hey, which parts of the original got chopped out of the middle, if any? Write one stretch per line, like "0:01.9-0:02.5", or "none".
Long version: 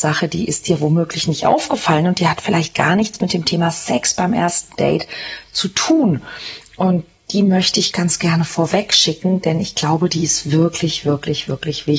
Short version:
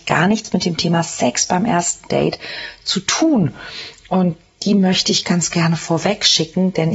none